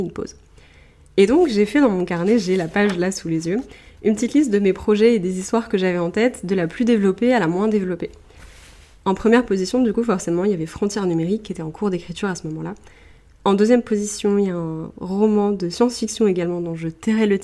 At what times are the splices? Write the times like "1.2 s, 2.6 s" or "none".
none